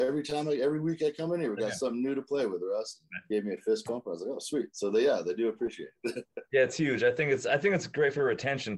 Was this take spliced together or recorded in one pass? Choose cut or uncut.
uncut